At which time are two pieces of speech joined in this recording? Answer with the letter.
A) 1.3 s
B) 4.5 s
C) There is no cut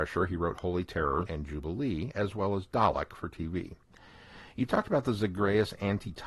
A